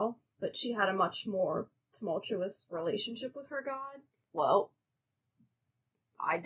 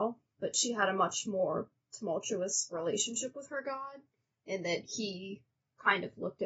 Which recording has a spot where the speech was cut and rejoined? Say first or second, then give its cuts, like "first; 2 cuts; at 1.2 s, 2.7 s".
first; 1 cut; at 4.2 s